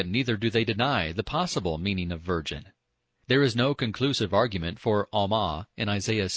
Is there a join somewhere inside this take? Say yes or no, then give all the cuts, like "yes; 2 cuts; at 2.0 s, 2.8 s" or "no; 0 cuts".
no; 0 cuts